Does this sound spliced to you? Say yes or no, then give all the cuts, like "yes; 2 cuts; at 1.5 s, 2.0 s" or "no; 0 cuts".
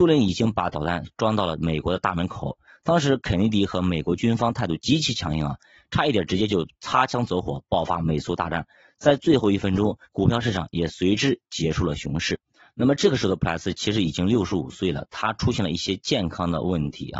yes; 1 cut; at 10.0 s